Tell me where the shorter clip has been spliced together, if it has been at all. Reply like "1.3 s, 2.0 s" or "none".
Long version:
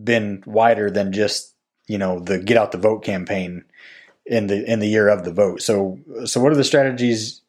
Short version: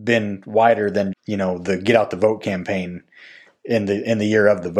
1.1 s